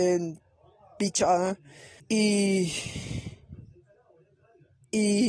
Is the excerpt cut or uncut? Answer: cut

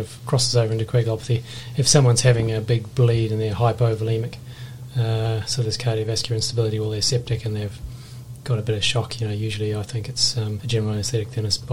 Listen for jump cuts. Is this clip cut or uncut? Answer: cut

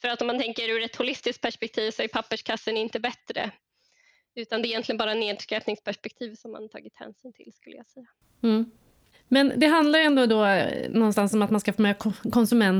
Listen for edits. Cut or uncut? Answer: uncut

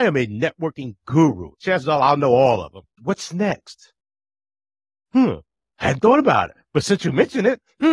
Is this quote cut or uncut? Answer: cut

